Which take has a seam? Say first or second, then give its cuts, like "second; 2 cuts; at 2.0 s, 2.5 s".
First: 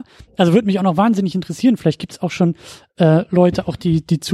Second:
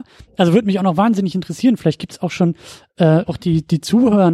second; 1 cut; at 3.3 s